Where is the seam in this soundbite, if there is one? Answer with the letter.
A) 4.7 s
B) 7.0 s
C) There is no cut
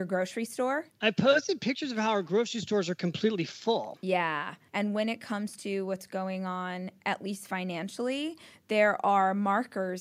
A